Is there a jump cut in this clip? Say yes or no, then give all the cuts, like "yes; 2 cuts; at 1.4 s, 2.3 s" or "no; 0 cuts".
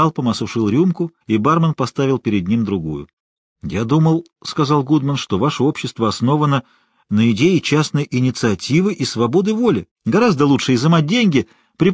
yes; 3 cuts; at 1.2 s, 3.2 s, 10.0 s